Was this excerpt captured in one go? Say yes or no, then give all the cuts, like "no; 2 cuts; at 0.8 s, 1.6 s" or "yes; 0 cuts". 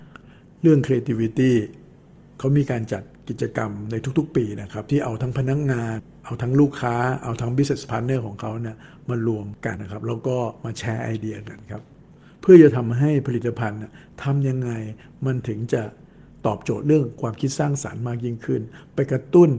no; 1 cut; at 9.8 s